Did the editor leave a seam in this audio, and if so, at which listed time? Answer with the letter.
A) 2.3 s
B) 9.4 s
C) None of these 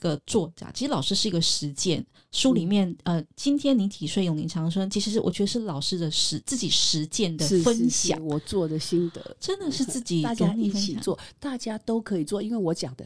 C